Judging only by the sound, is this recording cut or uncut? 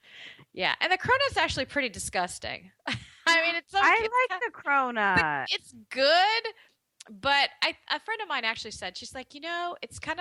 uncut